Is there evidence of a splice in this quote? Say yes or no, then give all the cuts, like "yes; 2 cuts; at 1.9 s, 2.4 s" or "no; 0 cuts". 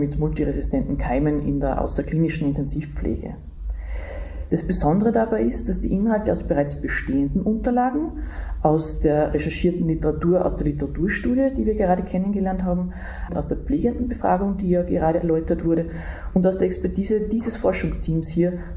yes; 1 cut; at 13.3 s